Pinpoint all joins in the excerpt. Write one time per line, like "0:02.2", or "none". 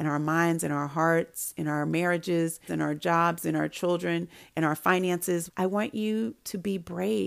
0:02.7
0:05.5